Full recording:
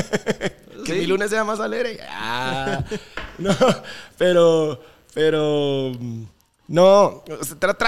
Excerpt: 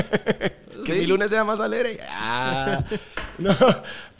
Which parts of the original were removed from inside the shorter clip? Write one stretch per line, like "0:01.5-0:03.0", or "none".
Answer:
none